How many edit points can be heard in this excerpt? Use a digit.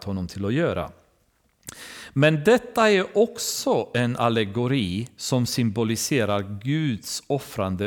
0